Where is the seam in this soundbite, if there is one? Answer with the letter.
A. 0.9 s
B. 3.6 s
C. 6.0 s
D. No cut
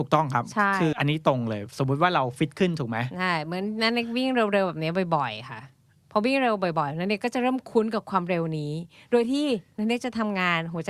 A